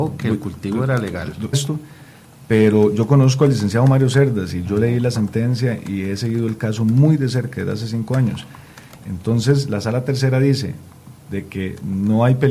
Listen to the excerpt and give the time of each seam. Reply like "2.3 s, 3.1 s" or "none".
1.5 s, 9.0 s, 11.3 s